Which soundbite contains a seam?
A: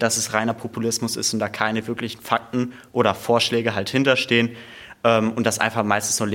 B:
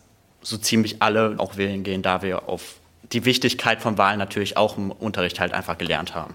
B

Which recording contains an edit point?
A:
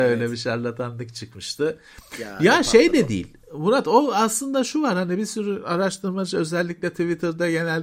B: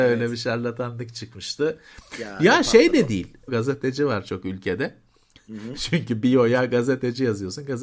B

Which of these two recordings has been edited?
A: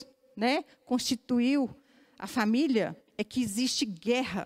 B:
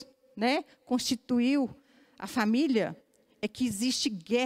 A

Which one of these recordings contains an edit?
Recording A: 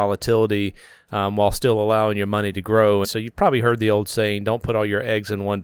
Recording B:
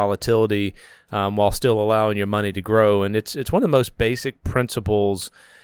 A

